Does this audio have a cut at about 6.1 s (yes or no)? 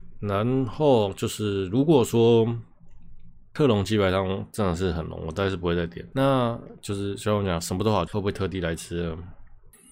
yes